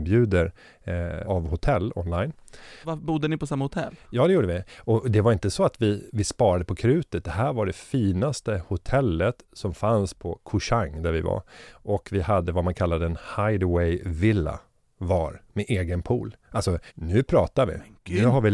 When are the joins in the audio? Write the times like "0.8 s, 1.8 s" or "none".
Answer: 1.2 s, 2.8 s, 16.9 s